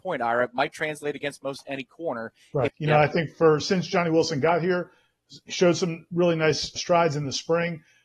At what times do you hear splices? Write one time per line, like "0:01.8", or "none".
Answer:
0:02.7
0:06.8